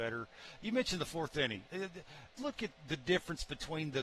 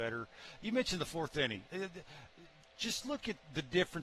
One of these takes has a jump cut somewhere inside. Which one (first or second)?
first